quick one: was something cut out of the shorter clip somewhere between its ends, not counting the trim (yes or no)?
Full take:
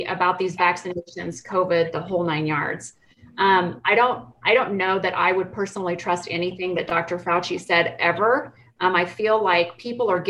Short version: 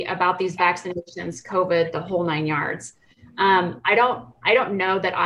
no